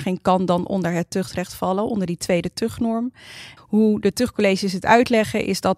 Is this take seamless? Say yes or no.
no